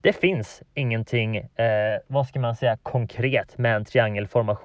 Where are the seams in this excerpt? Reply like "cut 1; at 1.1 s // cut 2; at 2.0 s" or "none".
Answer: none